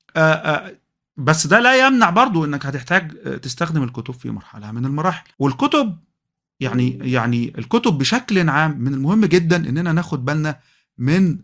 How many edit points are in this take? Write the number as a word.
one